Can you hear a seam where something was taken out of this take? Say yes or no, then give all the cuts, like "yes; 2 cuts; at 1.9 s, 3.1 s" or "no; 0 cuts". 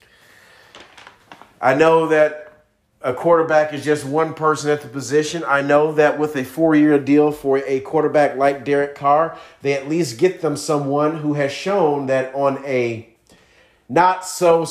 no; 0 cuts